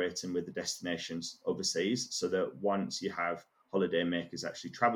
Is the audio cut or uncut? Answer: uncut